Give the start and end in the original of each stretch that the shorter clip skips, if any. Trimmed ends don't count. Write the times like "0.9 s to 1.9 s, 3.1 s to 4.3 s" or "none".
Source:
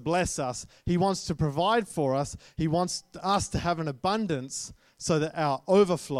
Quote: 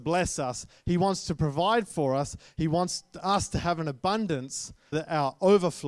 4.9 s to 5.2 s